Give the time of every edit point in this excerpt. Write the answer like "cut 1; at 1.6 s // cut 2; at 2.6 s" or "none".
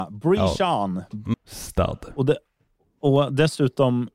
cut 1; at 1.3 s